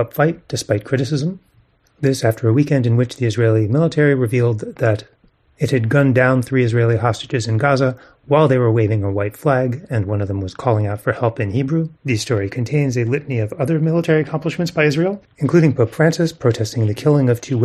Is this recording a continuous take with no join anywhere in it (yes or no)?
no